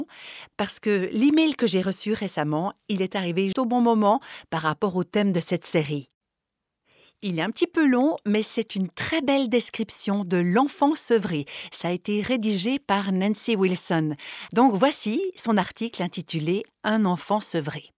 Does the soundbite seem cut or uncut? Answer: cut